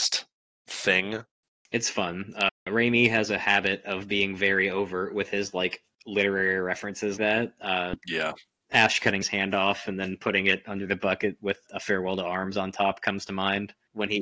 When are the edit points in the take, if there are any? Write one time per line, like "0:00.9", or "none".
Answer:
0:07.2
0:11.7